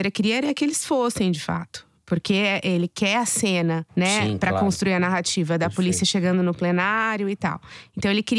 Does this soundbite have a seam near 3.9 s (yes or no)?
no